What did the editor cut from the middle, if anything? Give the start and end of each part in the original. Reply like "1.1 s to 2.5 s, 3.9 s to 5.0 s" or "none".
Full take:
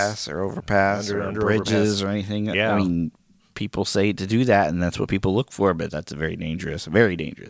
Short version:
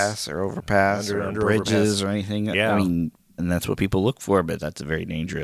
3.4 s to 4.7 s